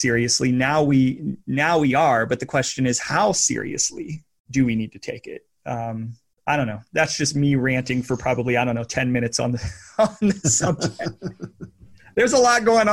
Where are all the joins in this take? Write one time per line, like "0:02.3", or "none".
none